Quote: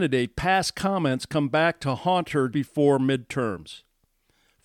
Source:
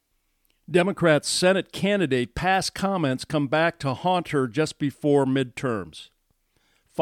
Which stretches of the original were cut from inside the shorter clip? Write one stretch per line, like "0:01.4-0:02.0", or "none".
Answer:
0:04.5-0:04.8